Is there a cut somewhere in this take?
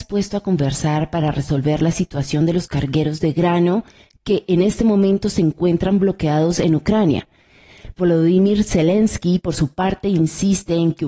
yes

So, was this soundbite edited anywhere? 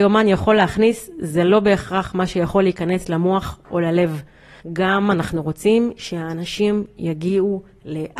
yes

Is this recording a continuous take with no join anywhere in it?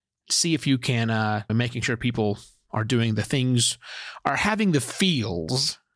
no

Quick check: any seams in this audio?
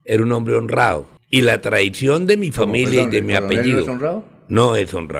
no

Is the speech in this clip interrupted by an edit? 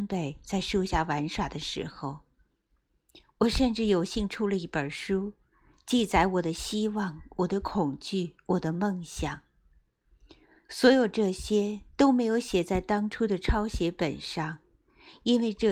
no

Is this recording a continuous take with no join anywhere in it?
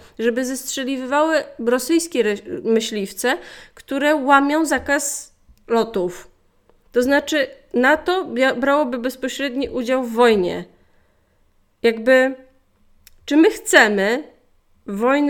yes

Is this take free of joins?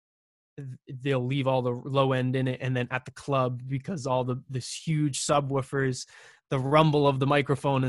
yes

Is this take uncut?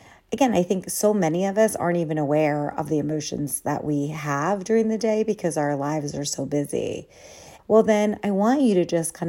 no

